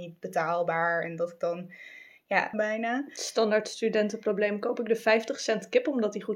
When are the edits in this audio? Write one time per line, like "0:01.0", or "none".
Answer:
0:02.5